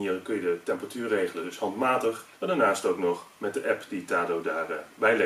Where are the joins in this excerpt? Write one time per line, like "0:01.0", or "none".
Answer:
0:02.3